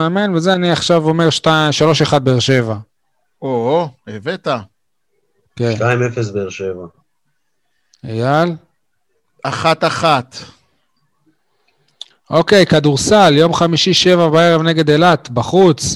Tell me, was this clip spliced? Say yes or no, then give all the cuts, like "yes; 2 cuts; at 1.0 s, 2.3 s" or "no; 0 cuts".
no; 0 cuts